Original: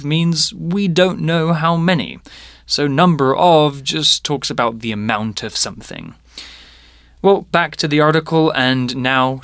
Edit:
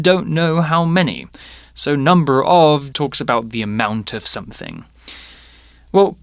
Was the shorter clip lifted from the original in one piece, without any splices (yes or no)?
no